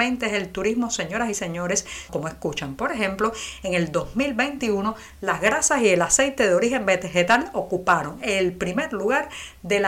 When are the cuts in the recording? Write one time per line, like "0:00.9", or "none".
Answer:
0:02.1